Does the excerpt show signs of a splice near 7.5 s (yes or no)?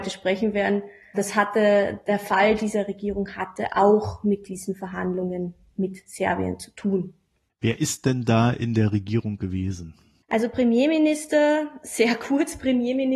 no